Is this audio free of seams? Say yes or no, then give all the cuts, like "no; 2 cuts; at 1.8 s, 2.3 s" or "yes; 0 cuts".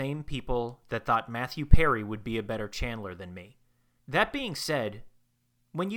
no; 1 cut; at 4.0 s